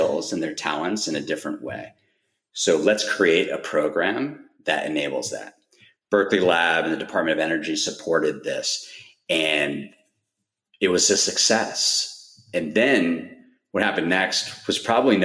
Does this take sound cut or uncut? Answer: uncut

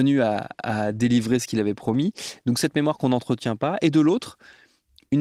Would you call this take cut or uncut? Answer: uncut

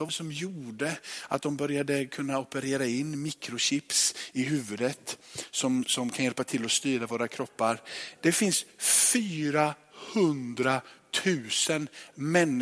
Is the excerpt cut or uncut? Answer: cut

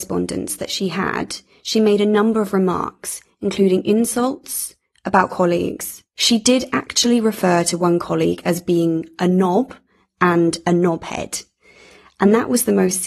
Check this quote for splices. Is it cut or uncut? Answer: cut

